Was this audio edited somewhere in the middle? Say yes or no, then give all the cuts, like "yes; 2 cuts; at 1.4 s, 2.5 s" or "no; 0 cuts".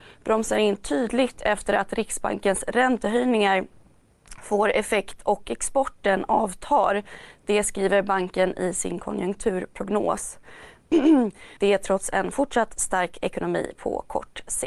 yes; 1 cut; at 11.6 s